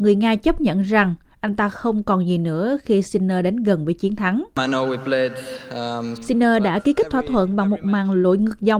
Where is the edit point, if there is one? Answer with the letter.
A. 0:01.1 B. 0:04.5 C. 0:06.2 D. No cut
C